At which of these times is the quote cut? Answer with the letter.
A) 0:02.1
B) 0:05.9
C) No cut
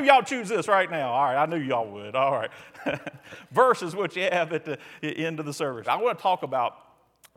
B